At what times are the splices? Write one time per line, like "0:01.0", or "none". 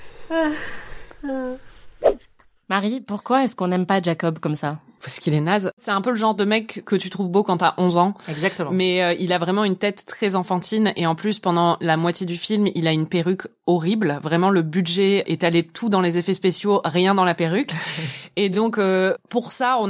none

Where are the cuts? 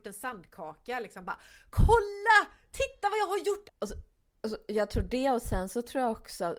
0:03.7

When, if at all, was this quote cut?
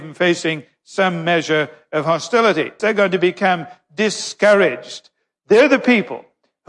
0:02.8

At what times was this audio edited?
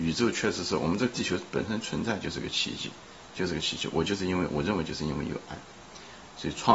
none

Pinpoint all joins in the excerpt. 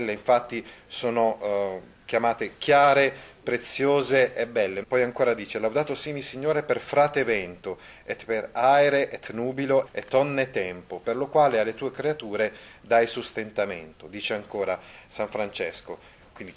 0:04.8
0:09.9

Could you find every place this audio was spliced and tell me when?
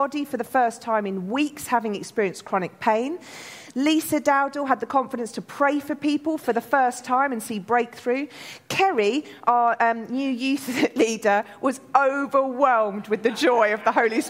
none

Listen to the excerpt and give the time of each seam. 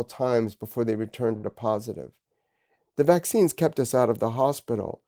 0:02.8

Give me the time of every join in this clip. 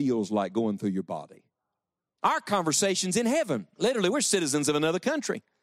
0:02.2
0:03.7

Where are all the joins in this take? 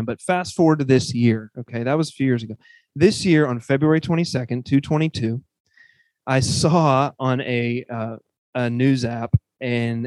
none

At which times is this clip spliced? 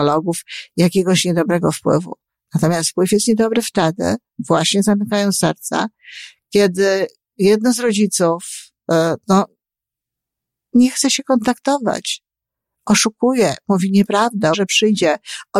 0:14.5

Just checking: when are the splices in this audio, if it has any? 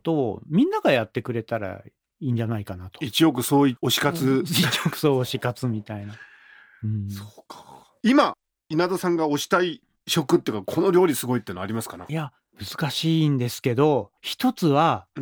0:14.2

